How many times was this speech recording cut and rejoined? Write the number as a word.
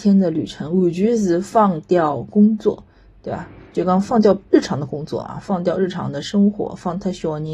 zero